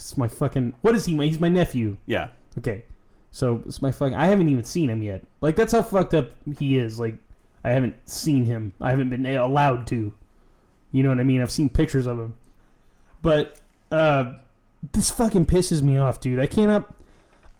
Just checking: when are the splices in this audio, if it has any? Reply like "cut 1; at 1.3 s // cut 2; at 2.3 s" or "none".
none